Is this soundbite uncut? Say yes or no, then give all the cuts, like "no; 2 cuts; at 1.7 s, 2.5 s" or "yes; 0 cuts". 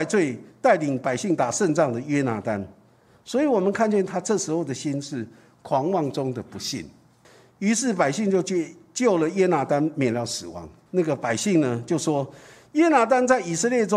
no; 2 cuts; at 7.2 s, 10.9 s